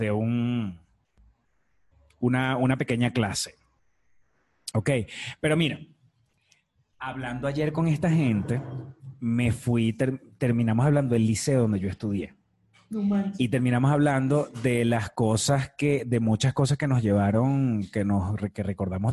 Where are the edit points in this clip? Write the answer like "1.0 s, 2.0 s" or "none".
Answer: none